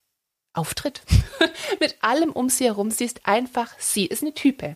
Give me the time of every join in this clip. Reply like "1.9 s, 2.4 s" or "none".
none